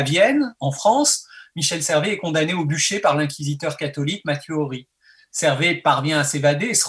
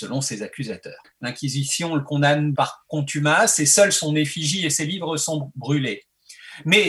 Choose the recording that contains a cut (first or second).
second